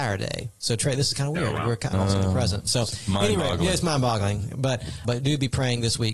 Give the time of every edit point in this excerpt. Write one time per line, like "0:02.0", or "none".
0:01.9
0:05.0